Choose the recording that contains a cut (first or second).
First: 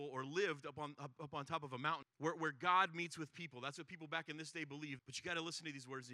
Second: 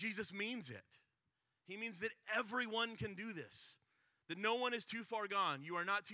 first